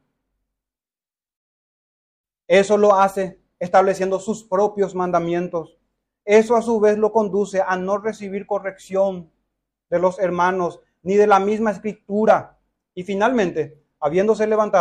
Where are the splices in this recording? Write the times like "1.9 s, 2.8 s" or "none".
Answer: none